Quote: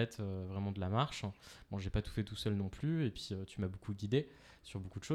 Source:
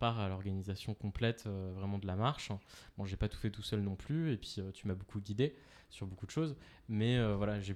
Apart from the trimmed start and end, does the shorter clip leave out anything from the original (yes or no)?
no